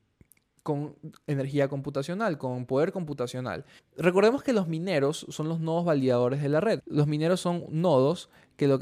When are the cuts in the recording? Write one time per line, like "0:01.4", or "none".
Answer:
0:03.8
0:06.8